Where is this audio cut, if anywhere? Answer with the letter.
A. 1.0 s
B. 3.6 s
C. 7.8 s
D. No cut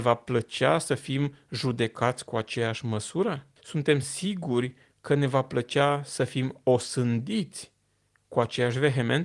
B